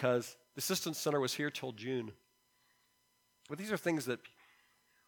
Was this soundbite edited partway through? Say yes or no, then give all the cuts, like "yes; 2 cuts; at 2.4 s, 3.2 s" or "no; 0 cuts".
yes; 1 cut; at 3.5 s